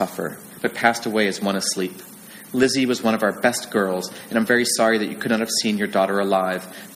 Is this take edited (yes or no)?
no